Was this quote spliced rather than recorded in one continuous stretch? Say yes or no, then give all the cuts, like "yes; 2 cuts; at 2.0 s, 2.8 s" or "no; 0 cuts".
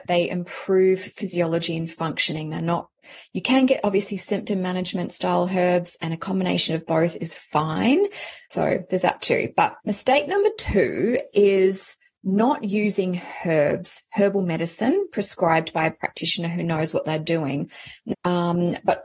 yes; 3 cuts; at 8.5 s, 9.8 s, 18.1 s